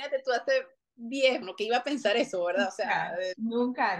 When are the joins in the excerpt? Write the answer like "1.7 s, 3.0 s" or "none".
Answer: 1.4 s

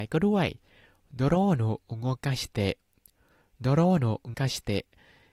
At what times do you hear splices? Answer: 4.3 s

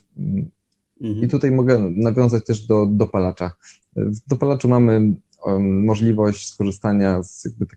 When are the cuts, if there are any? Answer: none

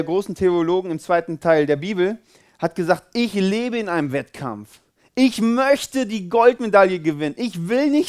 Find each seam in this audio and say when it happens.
none

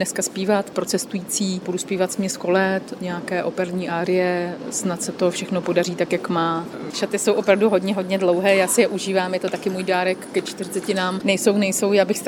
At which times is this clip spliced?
6.9 s, 11.2 s

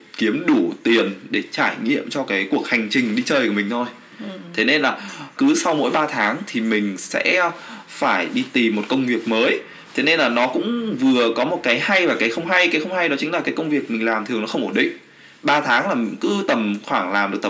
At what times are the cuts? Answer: 5.4 s

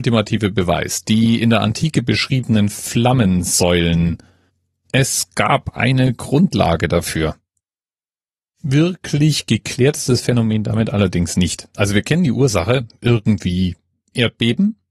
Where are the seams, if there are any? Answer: none

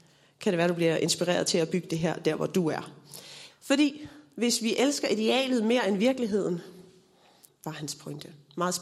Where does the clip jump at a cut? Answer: 3.5 s, 7.5 s

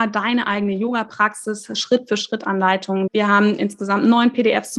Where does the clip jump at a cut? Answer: 3.1 s

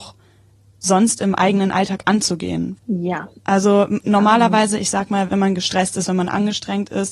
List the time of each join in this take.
2.8 s, 5.3 s

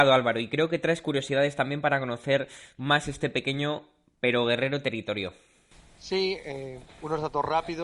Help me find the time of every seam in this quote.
none

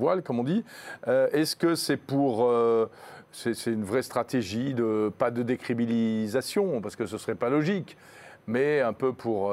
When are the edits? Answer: none

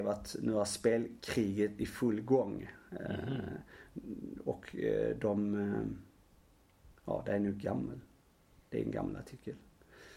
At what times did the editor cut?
none

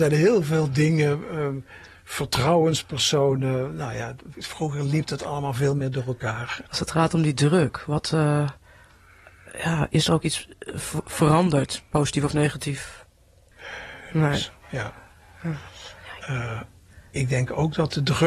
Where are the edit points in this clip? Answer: 6.6 s, 14.1 s, 16.2 s

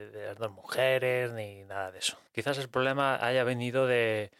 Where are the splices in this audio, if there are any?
2.3 s

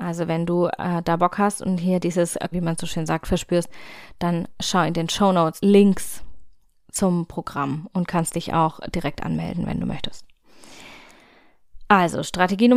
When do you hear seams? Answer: 2.5 s, 5.6 s

